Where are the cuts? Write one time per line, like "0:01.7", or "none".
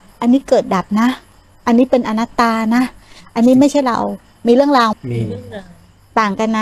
0:04.9

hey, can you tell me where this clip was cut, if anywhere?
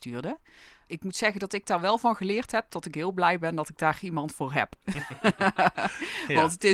none

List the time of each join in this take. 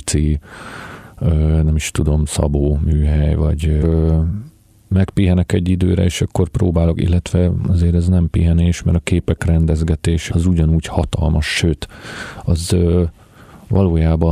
0:03.8
0:10.3

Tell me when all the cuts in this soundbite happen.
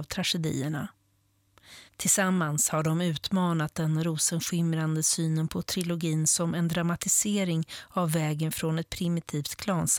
0:01.9

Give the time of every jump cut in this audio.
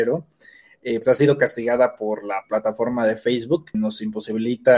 0:01.0
0:03.7

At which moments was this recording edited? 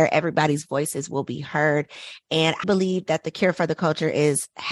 0:02.6

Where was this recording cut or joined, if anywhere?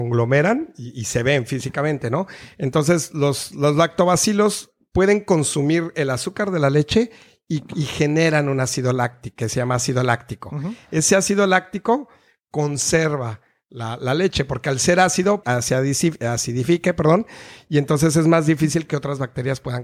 0:15.4

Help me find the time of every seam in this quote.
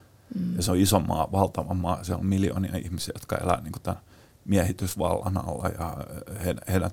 none

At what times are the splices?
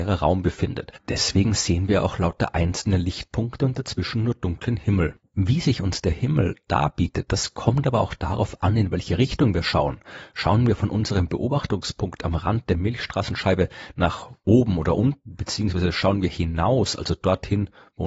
none

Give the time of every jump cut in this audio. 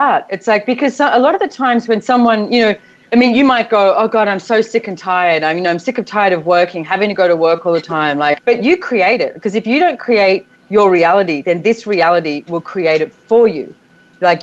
0:08.4

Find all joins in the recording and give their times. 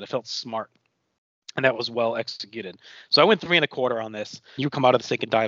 0:04.6

